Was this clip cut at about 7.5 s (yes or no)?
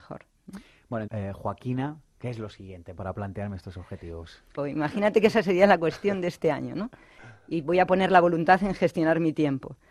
no